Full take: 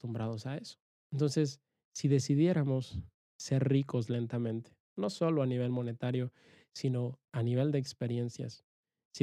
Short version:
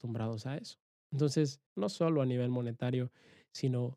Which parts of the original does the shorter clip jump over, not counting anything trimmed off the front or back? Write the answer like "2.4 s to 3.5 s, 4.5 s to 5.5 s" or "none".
1.7 s to 4.9 s